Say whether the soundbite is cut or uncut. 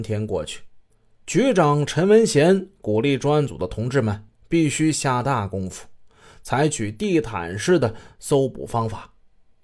uncut